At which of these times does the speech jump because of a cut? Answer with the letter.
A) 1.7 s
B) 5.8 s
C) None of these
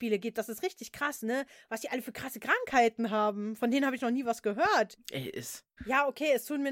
B